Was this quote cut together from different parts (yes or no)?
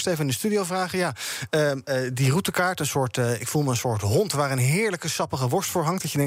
no